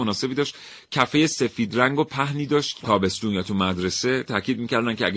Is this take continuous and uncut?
no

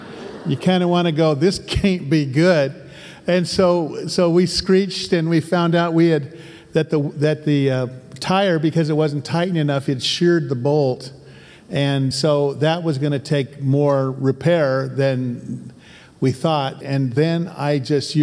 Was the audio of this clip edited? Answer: yes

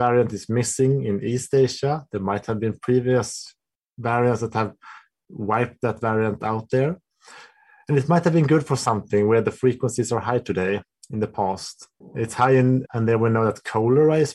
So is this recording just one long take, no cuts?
no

